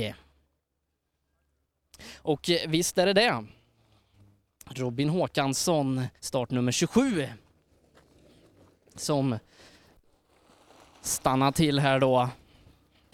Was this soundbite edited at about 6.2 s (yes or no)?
yes